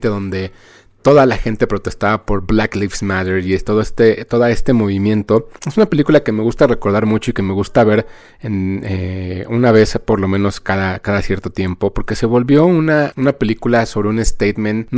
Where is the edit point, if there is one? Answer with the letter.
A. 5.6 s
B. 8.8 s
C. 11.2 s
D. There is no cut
A